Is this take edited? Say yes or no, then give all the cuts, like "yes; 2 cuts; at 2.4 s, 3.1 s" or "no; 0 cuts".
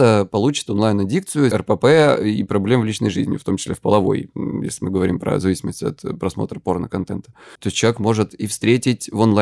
yes; 2 cuts; at 1.5 s, 7.6 s